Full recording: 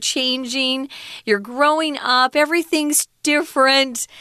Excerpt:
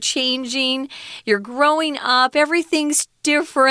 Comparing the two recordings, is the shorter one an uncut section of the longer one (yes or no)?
yes